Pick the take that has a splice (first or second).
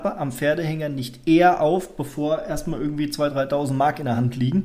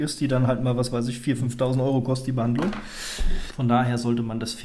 second